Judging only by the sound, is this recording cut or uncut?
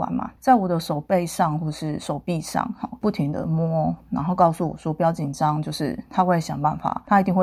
uncut